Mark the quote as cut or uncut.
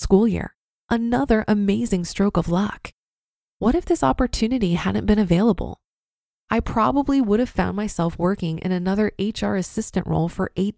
uncut